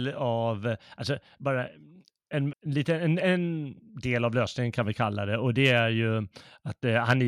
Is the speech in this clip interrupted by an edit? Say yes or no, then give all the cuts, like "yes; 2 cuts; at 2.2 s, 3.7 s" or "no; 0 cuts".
yes; 1 cut; at 2.5 s